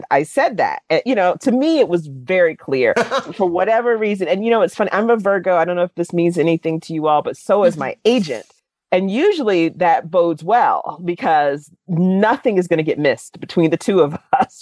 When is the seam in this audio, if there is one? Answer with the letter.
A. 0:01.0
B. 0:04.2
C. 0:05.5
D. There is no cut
D